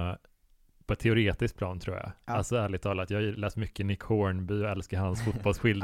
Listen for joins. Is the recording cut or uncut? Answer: uncut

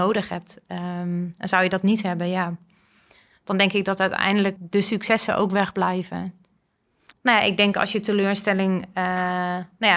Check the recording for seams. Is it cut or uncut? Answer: cut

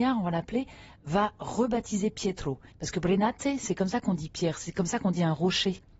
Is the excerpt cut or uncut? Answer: cut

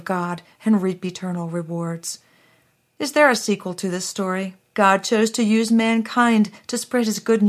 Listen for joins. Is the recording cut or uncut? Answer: cut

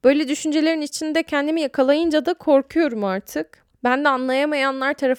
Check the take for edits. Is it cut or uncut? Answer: cut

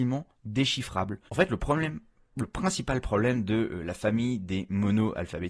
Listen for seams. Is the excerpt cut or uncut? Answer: cut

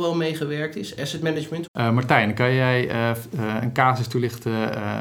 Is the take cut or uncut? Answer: cut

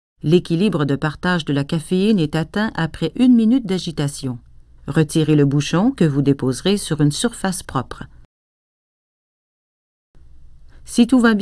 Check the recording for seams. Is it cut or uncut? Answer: cut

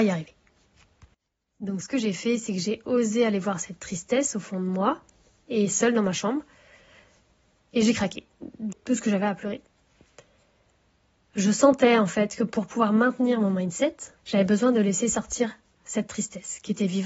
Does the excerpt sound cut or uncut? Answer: cut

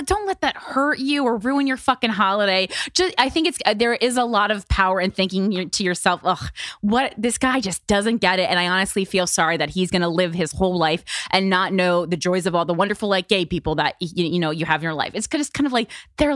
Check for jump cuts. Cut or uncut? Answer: uncut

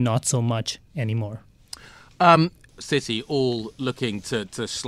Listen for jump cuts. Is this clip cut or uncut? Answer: cut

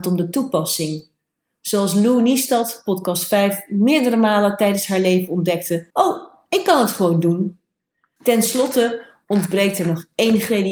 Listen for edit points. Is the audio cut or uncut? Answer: cut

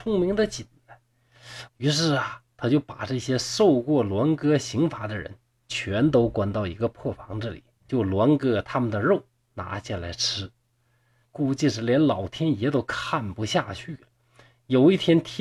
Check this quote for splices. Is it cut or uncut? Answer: cut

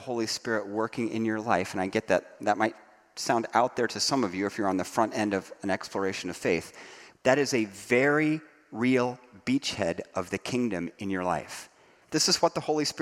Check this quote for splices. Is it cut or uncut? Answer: cut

